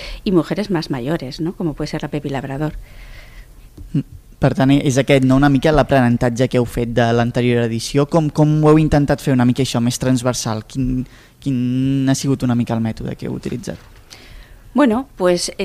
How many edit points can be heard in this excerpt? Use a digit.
0